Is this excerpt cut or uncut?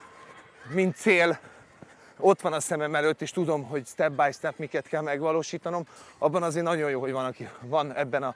uncut